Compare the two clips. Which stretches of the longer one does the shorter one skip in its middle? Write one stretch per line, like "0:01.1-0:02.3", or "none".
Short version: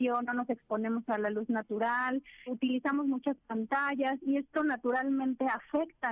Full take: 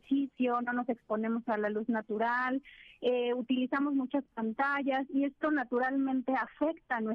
0:02.9-0:03.3